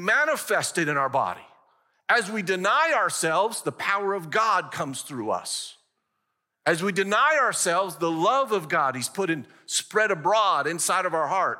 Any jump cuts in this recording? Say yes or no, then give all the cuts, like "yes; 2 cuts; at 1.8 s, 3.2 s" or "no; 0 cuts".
no; 0 cuts